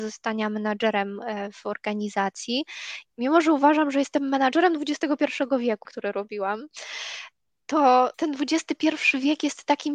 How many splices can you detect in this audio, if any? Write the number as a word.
three